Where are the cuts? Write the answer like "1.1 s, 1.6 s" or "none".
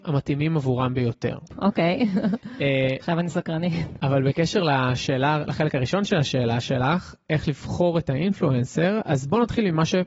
1.5 s